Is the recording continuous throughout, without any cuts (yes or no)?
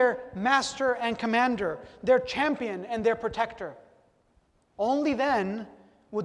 no